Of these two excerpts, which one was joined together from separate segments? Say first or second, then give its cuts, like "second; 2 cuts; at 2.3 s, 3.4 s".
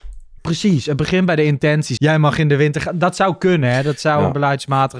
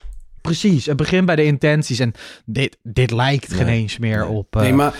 first; 1 cut; at 2.0 s